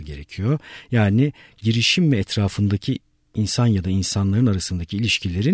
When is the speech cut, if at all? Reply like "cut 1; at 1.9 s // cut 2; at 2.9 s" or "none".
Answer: none